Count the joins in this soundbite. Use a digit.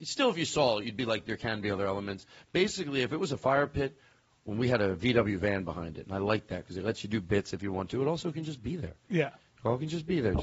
0